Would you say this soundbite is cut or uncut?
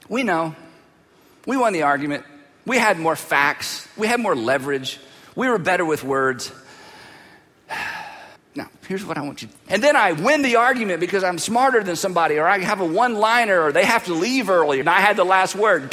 cut